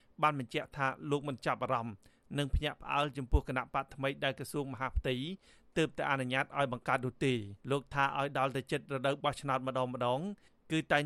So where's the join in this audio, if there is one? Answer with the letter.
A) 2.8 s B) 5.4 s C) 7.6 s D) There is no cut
C